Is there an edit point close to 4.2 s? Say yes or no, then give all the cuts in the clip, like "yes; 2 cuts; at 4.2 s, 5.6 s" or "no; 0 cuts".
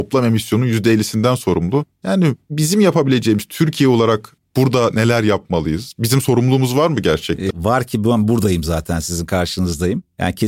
no; 2 cuts; at 1.9 s, 7.5 s